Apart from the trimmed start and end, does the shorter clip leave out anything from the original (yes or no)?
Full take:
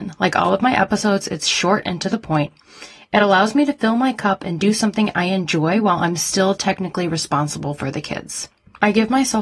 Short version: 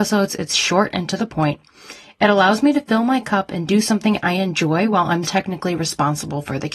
yes